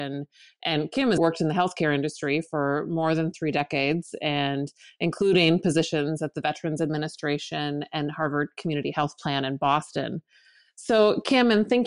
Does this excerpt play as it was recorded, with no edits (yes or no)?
no